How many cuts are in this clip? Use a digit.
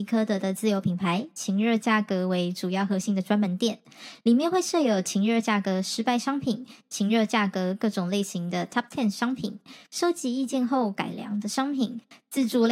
0